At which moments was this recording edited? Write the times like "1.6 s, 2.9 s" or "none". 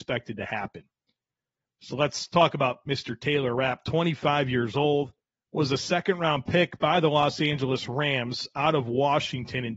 5.3 s